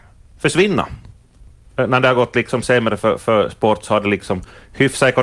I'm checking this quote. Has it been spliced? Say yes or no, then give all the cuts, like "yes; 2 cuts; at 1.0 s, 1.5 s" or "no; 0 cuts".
no; 0 cuts